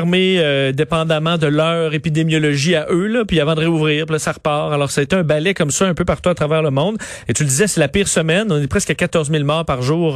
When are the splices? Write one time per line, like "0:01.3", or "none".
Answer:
none